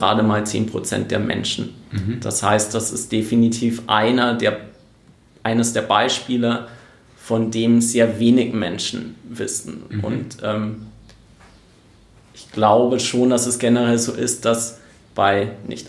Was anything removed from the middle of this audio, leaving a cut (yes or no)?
no